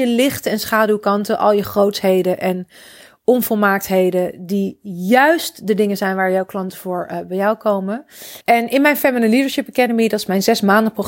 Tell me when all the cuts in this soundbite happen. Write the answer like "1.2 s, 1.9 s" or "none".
8.4 s